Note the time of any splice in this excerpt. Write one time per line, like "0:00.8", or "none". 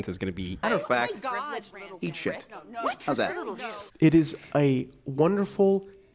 0:03.9